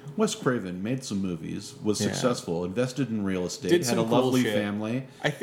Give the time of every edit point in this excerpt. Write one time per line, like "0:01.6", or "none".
none